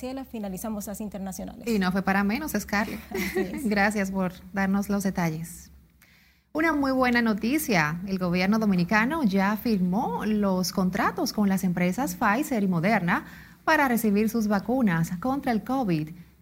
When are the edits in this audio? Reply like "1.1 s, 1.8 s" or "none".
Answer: none